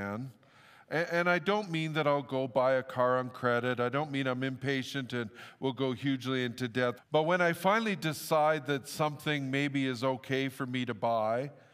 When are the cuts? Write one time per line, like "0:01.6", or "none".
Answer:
0:07.0